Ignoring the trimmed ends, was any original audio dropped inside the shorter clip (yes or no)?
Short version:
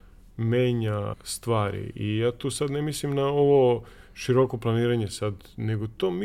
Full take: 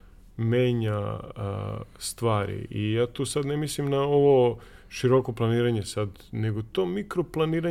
yes